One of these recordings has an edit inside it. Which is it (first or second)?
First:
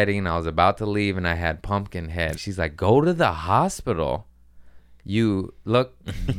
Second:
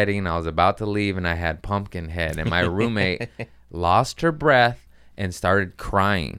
first